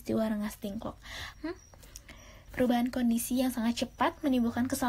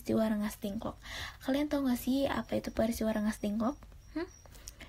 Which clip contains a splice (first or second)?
first